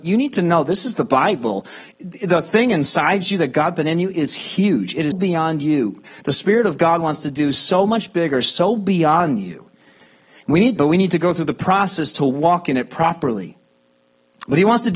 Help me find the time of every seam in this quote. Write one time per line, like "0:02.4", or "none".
0:05.1
0:10.8